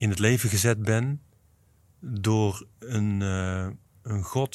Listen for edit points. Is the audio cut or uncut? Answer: uncut